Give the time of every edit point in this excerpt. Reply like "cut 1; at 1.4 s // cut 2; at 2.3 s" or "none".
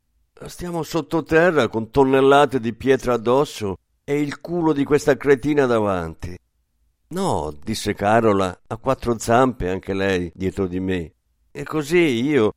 cut 1; at 11.4 s